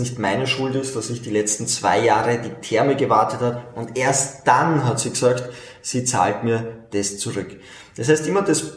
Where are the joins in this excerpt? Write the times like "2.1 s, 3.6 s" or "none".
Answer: none